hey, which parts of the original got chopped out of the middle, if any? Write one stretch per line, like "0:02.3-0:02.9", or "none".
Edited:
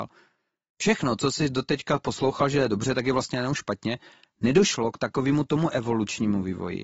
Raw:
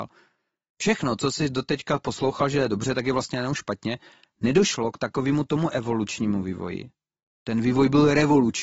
none